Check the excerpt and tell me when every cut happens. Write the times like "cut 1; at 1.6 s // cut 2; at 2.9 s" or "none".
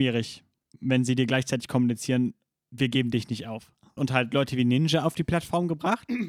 cut 1; at 4.0 s